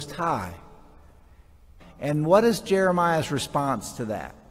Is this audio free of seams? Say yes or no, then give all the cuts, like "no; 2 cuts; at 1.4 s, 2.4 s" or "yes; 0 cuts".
no; 1 cut; at 1.8 s